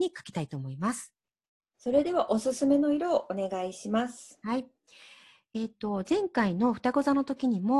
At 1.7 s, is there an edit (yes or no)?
yes